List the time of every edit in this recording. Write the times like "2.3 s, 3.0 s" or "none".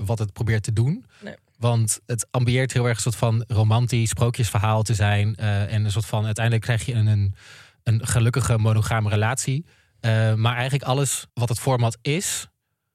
11.3 s